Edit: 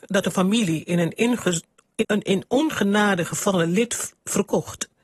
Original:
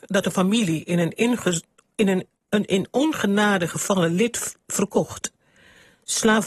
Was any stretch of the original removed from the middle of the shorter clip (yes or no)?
yes